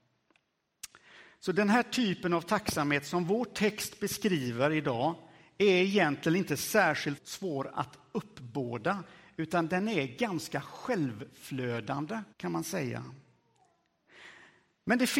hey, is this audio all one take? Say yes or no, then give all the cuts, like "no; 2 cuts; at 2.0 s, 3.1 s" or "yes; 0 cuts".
no; 2 cuts; at 7.2 s, 12.3 s